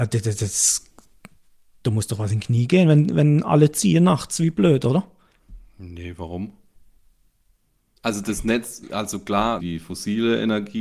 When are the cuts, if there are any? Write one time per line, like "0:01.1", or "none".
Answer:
0:08.0
0:09.6

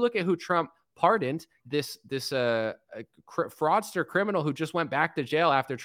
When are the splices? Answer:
0:01.6

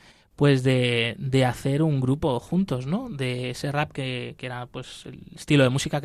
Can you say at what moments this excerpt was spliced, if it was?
none

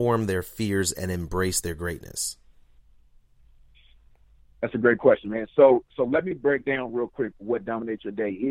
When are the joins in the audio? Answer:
none

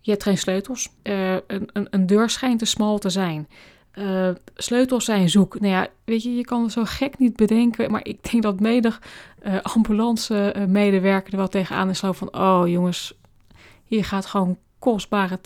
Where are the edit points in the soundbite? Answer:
0:01.0

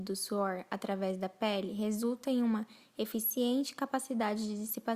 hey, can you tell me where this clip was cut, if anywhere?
none

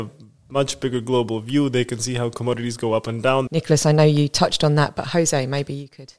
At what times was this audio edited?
0:03.5

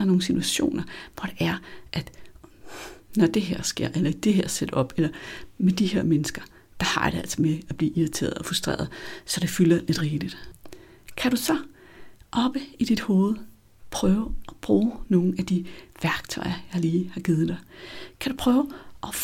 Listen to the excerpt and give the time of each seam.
none

